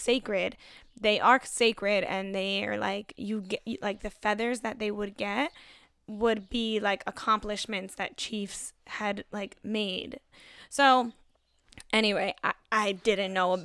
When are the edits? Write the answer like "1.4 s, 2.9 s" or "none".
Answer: none